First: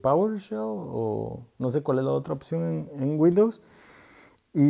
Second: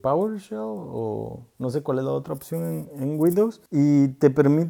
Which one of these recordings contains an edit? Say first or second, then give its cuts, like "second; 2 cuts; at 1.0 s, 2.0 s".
second; 1 cut; at 3.7 s